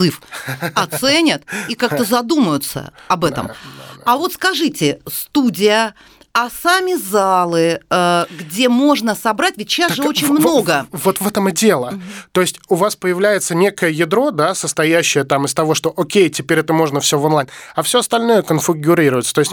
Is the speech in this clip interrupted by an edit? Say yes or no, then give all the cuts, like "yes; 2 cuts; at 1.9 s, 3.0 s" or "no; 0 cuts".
no; 0 cuts